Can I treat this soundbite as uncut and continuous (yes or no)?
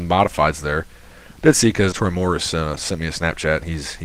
no